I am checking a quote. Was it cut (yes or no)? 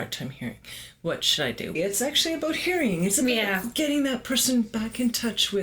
yes